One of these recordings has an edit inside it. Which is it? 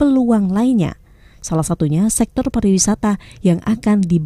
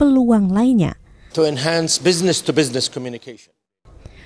second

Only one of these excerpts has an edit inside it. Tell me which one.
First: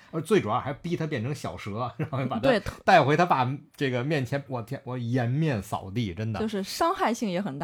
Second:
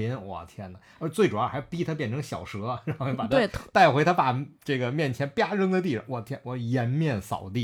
first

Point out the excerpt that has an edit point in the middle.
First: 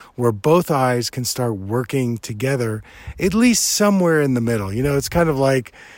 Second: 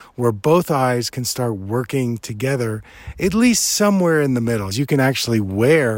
second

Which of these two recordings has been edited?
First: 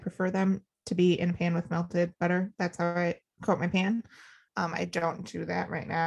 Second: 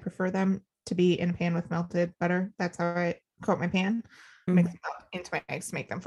second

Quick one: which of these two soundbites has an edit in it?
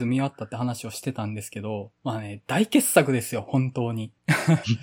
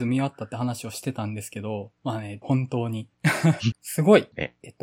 second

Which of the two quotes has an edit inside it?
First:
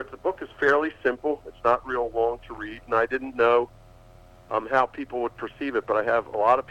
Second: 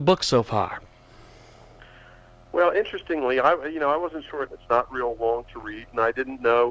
second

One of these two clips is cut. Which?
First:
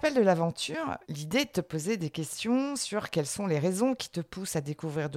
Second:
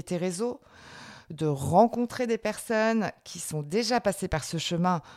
first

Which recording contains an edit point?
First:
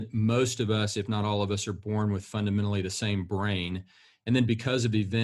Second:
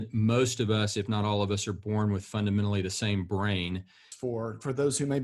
second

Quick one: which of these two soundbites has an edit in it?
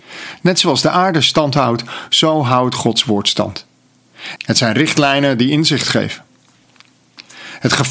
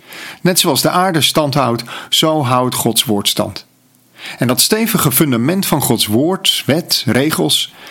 first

